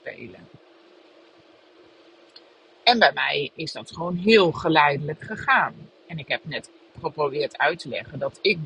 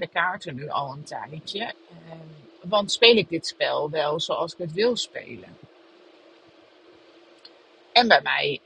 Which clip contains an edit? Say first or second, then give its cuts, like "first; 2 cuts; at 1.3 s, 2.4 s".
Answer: second; 1 cut; at 1.7 s